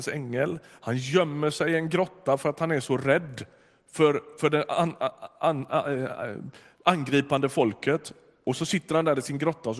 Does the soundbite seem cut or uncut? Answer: uncut